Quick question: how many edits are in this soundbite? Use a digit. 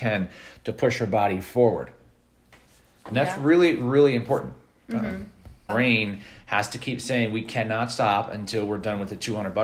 1